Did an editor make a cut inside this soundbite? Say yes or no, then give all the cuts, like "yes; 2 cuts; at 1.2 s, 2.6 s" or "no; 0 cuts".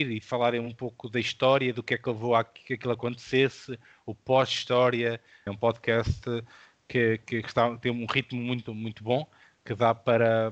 yes; 2 cuts; at 5.5 s, 8.7 s